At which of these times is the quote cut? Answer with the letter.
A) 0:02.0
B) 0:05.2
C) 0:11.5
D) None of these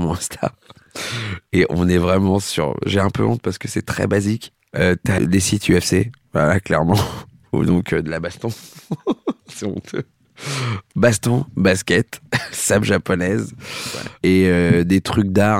B